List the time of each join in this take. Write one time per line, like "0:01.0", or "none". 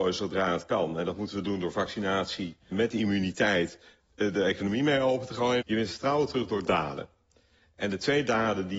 0:02.7
0:05.6